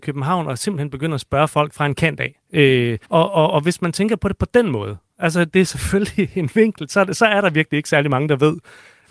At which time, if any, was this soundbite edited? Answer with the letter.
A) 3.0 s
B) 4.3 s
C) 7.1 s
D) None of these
A